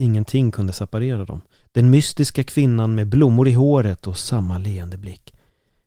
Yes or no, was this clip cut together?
yes